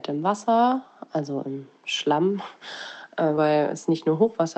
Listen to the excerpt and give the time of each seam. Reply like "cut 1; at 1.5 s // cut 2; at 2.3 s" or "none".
cut 1; at 3.4 s